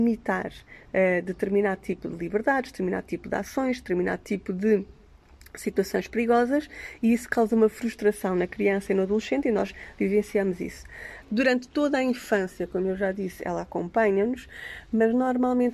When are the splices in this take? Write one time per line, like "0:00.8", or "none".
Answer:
0:11.2